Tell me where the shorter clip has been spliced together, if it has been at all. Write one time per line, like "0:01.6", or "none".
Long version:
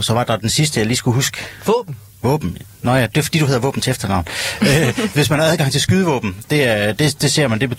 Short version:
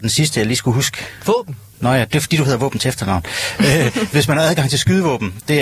0:01.7